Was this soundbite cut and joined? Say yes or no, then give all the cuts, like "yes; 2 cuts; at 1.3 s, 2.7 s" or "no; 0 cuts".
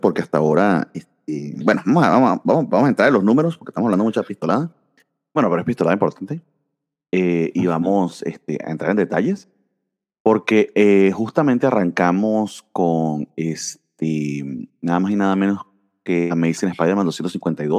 no; 0 cuts